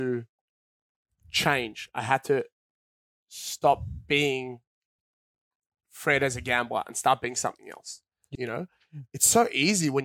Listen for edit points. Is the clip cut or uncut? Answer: cut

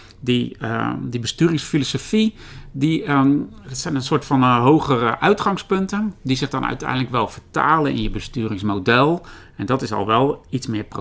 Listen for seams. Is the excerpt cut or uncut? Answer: uncut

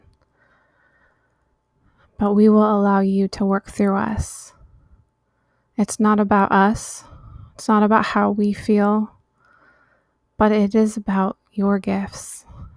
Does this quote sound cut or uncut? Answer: uncut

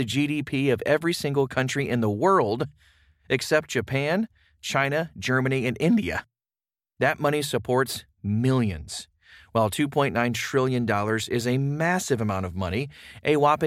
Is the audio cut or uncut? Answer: uncut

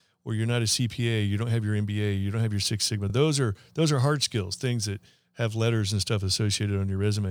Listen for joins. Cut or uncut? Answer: uncut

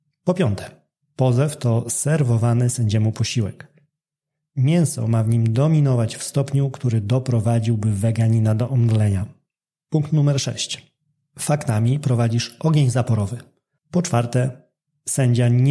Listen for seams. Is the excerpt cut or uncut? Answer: cut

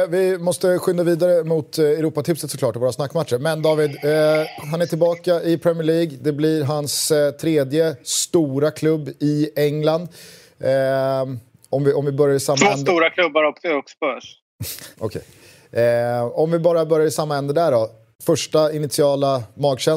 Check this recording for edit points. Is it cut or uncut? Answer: cut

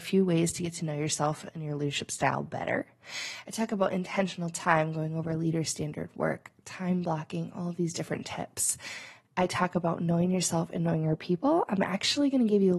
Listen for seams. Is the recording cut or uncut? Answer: cut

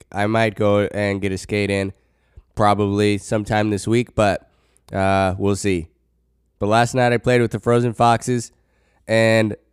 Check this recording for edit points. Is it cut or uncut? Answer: uncut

